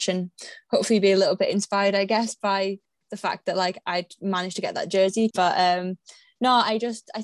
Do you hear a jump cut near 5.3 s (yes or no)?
yes